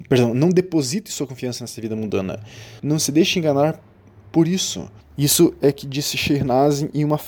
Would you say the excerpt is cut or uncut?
cut